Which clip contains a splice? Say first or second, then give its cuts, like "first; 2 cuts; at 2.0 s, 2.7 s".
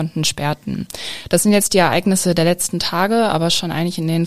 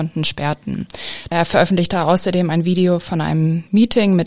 second; 1 cut; at 1.3 s